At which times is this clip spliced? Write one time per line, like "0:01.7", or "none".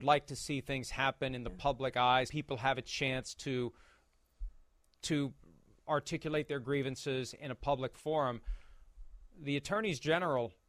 0:02.3